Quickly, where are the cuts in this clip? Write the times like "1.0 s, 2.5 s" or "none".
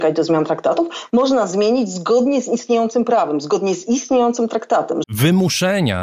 5.0 s